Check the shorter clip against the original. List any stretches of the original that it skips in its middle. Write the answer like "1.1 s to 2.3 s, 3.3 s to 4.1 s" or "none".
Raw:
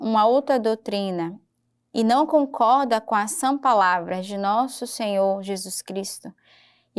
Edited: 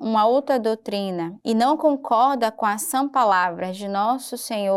1.4 s to 1.9 s